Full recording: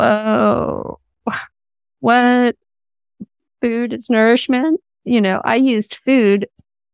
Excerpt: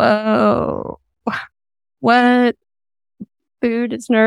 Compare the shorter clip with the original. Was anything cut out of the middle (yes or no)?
no